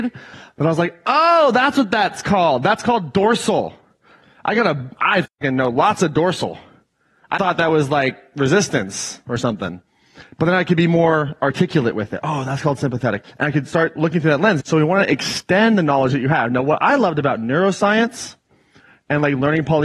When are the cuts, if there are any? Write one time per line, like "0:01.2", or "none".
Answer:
0:07.4
0:13.2
0:14.6